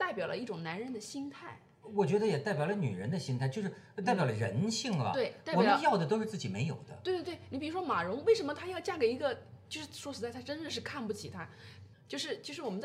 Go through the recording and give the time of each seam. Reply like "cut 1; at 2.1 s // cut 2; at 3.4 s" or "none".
cut 1; at 11.9 s